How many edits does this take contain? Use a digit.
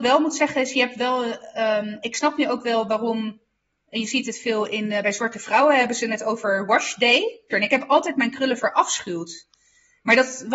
2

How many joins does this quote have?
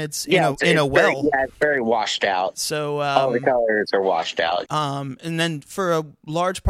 2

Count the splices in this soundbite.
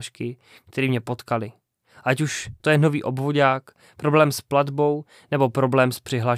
0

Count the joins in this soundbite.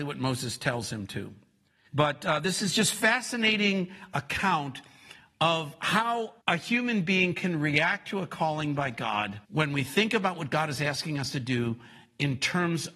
3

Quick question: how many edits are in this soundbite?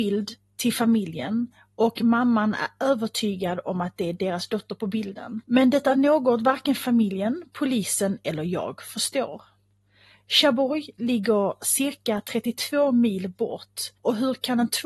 1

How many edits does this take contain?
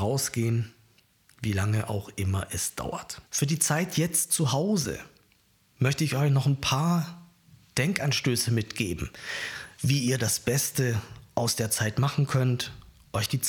1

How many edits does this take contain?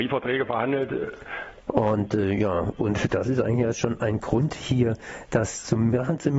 1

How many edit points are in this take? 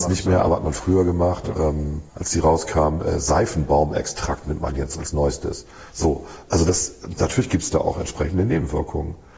2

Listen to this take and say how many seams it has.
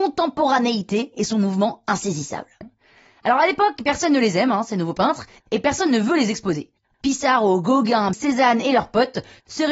3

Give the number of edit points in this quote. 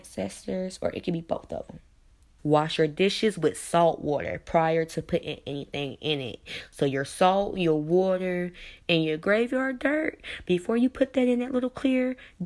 1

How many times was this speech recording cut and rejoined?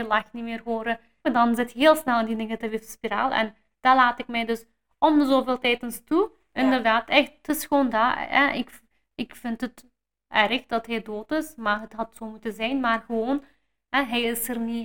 2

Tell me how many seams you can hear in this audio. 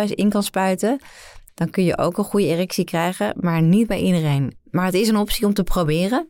2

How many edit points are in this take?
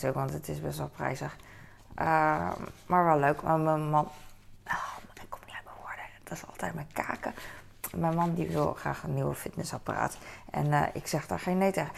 0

